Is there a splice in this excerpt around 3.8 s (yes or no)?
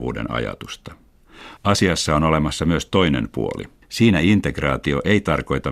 yes